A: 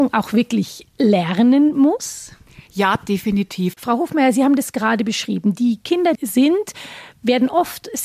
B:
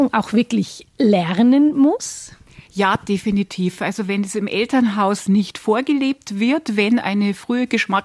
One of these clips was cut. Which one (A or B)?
A